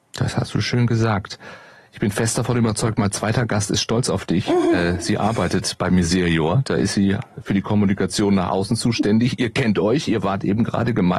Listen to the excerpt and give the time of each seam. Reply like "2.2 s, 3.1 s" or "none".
none